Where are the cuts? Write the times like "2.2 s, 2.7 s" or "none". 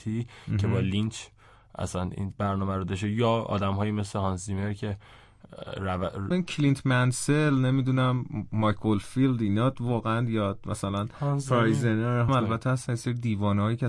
6.3 s, 12.3 s